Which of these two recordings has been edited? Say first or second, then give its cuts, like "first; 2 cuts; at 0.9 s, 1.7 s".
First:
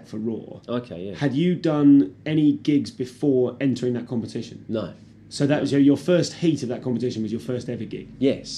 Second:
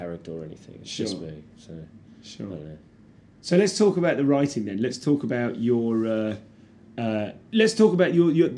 second; 1 cut; at 7.5 s